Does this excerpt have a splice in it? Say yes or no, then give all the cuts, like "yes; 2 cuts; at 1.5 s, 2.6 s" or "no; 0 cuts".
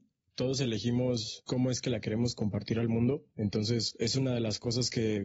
yes; 1 cut; at 3.3 s